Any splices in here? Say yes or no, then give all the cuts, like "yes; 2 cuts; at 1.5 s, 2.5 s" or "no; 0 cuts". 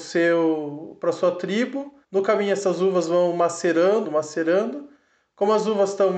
yes; 2 cuts; at 2.0 s, 4.0 s